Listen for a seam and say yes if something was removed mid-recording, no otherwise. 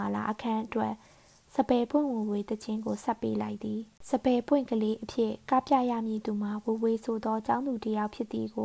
no